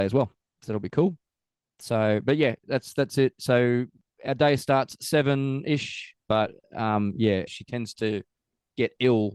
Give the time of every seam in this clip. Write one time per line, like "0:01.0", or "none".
0:06.3
0:07.5